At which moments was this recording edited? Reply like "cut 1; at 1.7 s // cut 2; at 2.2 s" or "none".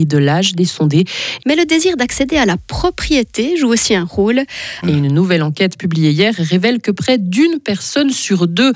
cut 1; at 1.4 s // cut 2; at 4.8 s